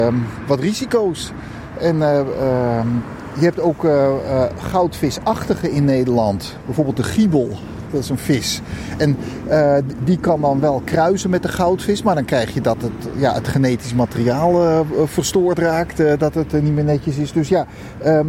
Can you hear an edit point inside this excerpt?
no; 0 cuts

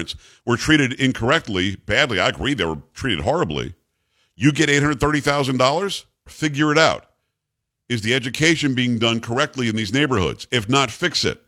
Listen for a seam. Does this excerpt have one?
yes; 1 cut; at 6.3 s

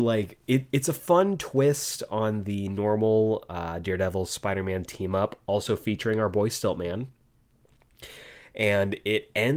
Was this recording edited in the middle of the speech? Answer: no; 0 cuts

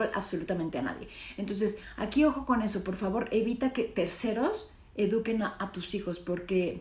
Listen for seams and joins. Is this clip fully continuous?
yes; 0 cuts

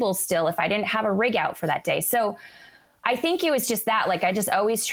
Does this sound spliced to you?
no; 0 cuts

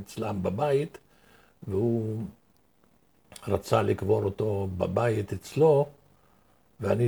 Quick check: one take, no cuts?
yes; 0 cuts

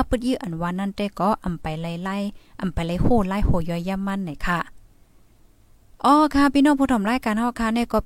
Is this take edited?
no; 0 cuts

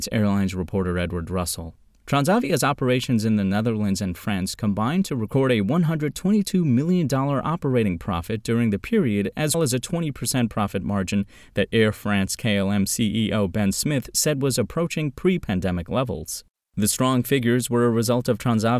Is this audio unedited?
no; 1 cut; at 9.5 s

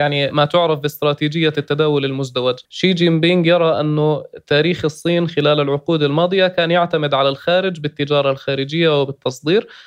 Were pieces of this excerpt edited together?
yes; 1 cut; at 2.7 s

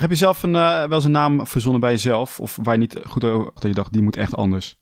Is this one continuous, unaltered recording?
no; 1 cut; at 3.6 s

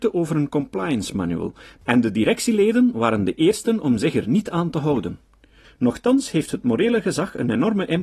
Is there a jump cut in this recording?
yes; 1 cut; at 5.6 s

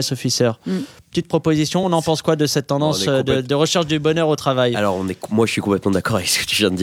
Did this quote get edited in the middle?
no; 0 cuts

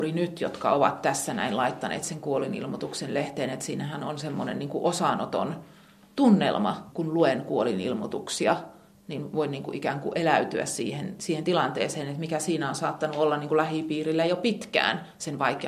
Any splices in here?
no; 0 cuts

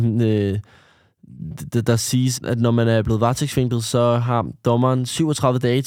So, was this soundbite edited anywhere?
yes; 1 cut; at 2.3 s

